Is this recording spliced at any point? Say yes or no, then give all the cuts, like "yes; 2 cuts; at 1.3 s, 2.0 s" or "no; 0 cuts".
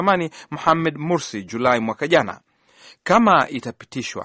no; 0 cuts